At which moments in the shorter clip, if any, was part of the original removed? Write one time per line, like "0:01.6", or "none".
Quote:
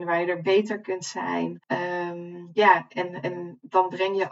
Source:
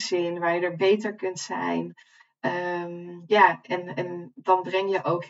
0:01.6